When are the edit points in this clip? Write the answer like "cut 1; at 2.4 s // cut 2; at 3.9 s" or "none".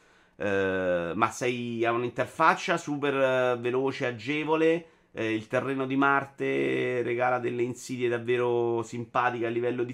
none

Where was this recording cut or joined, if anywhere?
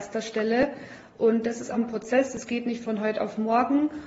cut 1; at 1.7 s

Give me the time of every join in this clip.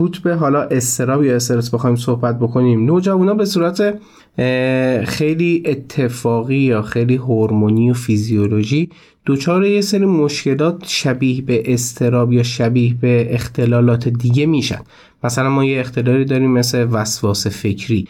none

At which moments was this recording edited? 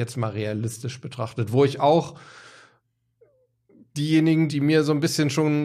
cut 1; at 4.5 s

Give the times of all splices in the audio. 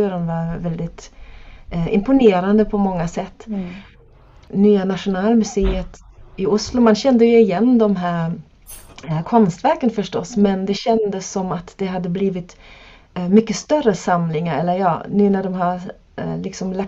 none

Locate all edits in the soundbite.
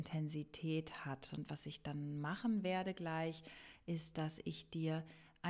none

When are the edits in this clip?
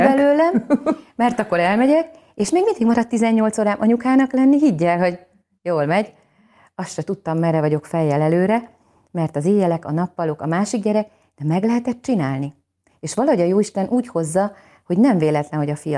none

